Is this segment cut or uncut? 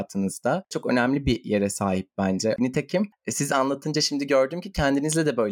cut